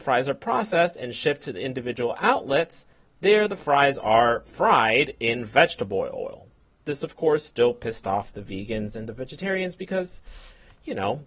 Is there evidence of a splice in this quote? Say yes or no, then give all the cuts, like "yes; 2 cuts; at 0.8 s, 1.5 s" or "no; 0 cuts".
no; 0 cuts